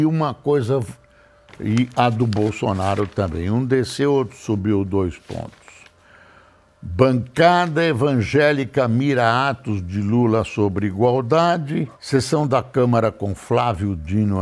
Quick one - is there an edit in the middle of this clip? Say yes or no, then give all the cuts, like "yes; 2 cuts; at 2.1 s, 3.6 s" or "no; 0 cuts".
yes; 2 cuts; at 1.5 s, 11.9 s